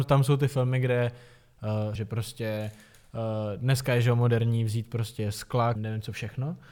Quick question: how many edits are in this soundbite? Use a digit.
2